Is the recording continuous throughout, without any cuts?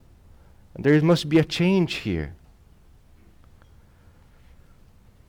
yes; 0 cuts

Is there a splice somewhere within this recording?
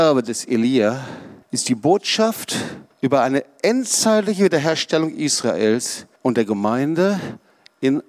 yes; 3 cuts; at 1.4 s, 2.9 s, 6.2 s

